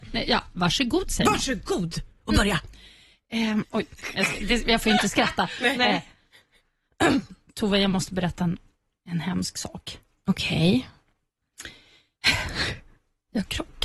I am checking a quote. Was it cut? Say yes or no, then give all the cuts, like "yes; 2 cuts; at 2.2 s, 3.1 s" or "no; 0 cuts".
yes; 1 cut; at 3.6 s